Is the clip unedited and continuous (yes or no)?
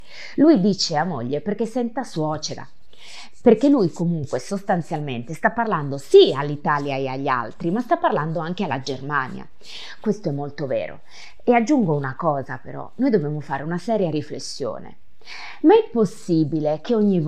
no